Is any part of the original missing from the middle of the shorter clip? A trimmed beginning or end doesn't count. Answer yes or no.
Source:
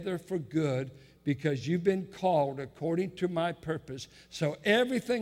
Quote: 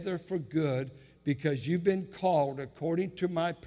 no